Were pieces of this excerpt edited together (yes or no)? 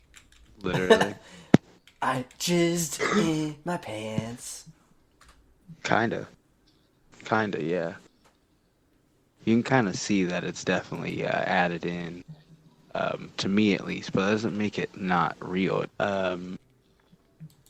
yes